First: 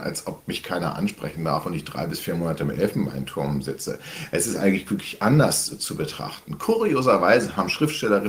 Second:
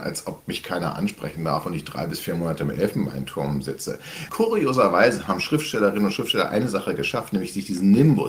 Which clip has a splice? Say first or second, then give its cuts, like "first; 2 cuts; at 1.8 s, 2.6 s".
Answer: second; 1 cut; at 4.3 s